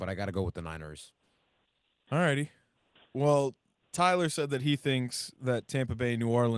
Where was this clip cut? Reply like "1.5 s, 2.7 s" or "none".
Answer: none